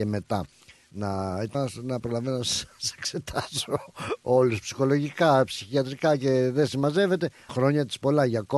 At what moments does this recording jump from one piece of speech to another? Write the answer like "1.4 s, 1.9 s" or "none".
1.5 s, 7.5 s